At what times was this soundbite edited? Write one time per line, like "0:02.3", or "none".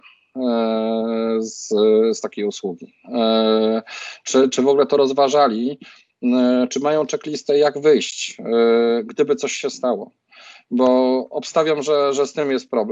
none